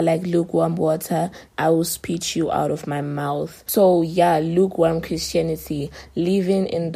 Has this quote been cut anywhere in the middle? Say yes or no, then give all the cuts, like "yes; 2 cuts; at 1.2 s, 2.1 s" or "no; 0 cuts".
yes; 1 cut; at 1.5 s